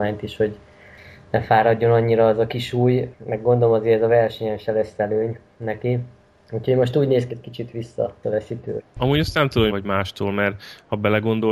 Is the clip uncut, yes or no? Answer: no